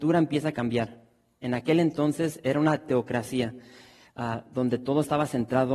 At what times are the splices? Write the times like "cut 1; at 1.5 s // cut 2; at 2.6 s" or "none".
none